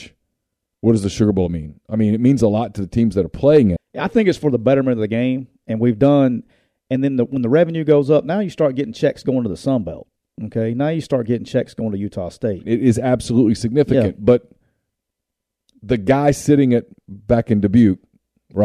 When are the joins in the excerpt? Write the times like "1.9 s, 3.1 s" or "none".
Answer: 3.8 s, 12.6 s, 17.0 s

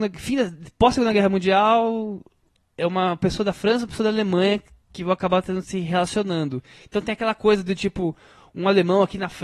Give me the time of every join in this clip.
none

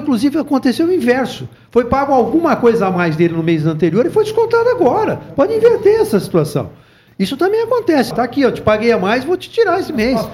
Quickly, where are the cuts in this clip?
8.1 s

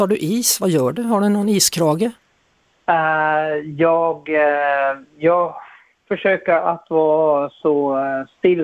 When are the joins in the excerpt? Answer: none

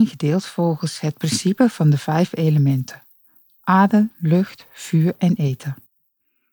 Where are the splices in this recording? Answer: 4.1 s

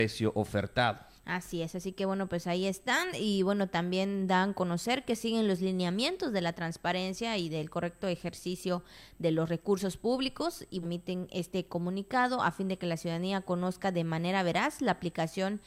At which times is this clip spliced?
10.8 s

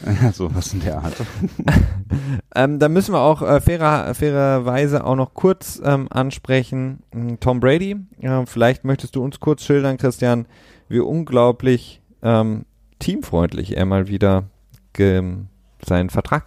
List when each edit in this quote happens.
none

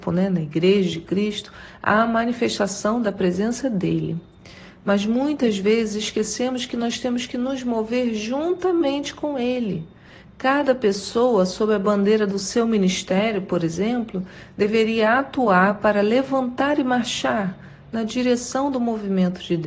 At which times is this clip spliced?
none

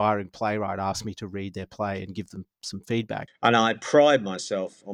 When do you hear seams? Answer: 3.3 s

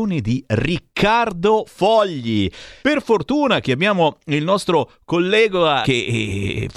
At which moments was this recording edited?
2.8 s, 5.8 s

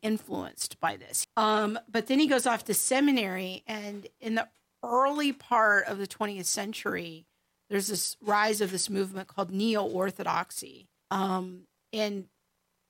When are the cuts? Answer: 1.2 s, 11.0 s

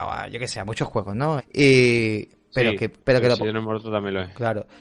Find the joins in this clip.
1.4 s

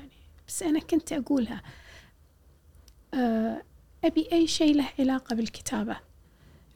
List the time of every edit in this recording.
none

